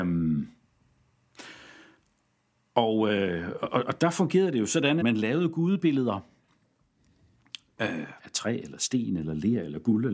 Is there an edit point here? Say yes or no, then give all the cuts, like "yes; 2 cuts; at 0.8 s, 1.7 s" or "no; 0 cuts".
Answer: yes; 2 cuts; at 5.0 s, 8.2 s